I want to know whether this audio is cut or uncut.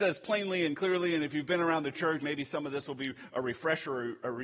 cut